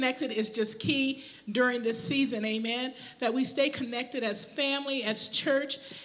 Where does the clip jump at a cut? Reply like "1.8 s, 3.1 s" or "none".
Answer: none

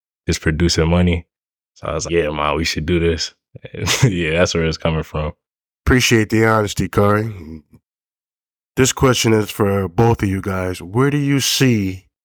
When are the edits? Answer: 2.1 s

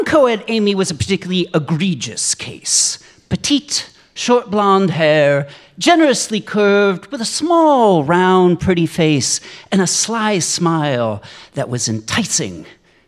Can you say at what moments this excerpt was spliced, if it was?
none

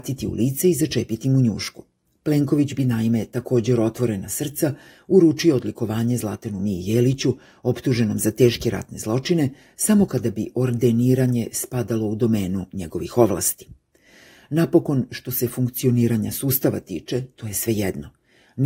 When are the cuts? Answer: none

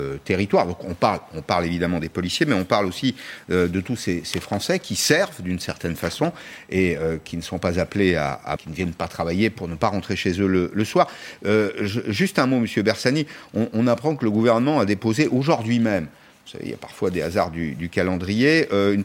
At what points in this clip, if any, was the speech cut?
8.6 s

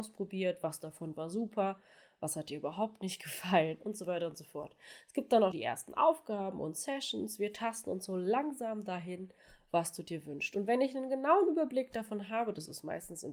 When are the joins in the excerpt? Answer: 5.5 s

